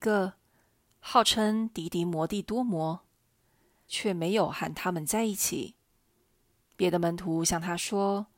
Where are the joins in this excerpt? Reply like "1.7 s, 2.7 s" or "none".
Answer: 3.9 s